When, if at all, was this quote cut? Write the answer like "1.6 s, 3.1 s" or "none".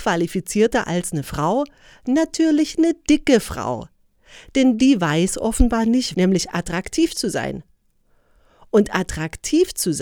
6.1 s